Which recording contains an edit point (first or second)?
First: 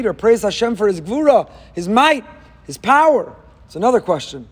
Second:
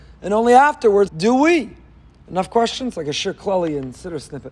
second